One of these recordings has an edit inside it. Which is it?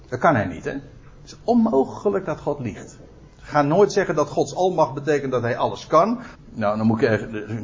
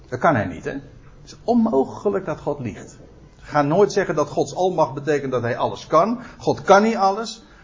first; 1 cut; at 6.4 s

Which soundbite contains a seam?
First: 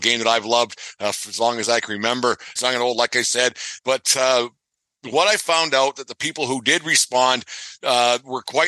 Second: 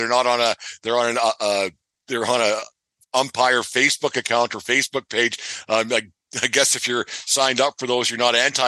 first; 2 cuts; at 2.6 s, 3.8 s

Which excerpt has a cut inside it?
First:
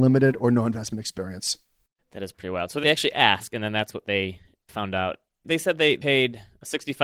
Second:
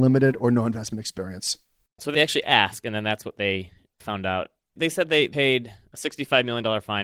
second; 1 cut; at 2.0 s

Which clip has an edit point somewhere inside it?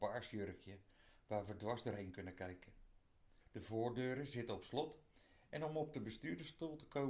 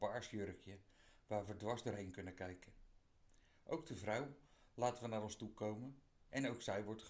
first; 1 cut; at 3.4 s

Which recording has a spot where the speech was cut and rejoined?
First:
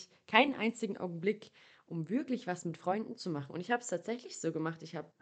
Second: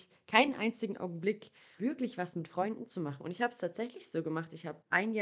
second; 1 cut; at 1.8 s

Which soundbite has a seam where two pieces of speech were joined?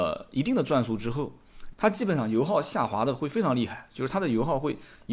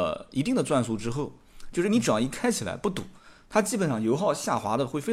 first; 1 cut; at 1.7 s

